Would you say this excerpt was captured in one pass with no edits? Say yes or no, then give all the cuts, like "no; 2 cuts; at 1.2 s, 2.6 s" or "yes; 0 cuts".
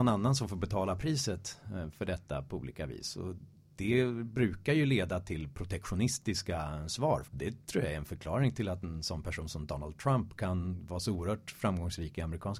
no; 1 cut; at 7.2 s